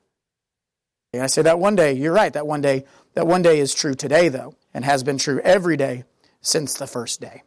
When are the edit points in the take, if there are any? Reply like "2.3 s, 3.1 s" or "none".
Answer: 1.1 s, 4.6 s

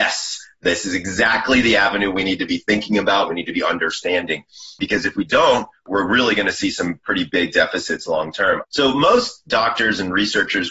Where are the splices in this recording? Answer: 3.3 s, 8.6 s

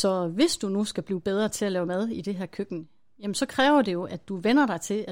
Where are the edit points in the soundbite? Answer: none

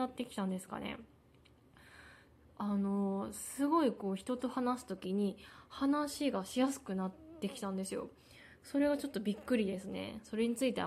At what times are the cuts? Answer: none

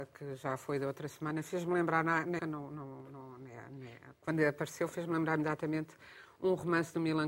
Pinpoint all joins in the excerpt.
2.4 s

